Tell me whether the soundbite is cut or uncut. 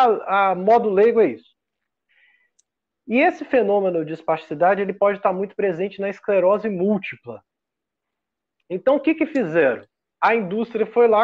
uncut